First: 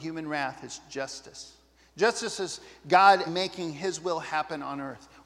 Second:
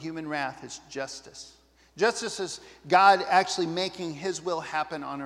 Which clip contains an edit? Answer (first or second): first